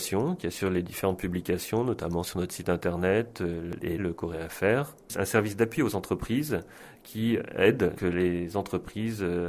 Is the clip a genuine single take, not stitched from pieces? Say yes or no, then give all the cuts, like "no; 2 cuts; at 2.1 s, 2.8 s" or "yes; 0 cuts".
no; 2 cuts; at 4.0 s, 8.0 s